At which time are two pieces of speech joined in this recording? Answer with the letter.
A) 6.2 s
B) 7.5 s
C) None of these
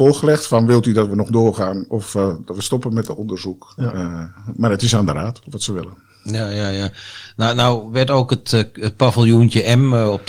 C